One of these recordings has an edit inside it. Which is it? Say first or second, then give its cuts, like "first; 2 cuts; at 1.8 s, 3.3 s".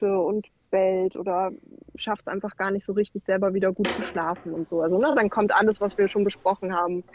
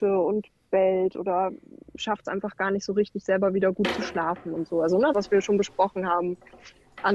second; 1 cut; at 5.1 s